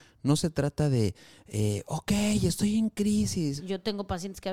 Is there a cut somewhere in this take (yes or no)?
yes